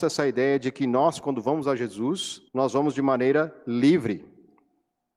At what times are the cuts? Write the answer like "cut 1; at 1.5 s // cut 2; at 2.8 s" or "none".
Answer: cut 1; at 2.5 s